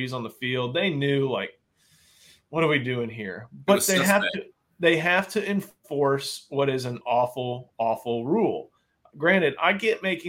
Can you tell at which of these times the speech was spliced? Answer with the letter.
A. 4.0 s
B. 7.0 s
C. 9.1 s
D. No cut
D